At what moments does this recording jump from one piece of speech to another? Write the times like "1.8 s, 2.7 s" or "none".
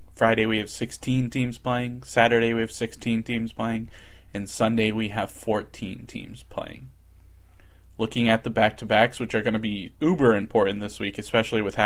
none